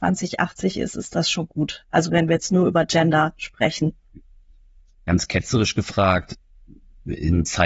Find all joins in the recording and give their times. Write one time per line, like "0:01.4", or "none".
none